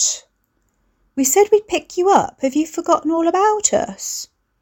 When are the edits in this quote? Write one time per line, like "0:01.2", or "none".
none